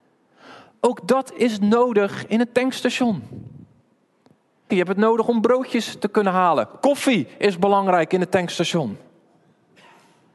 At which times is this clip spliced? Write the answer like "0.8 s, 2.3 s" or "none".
4.7 s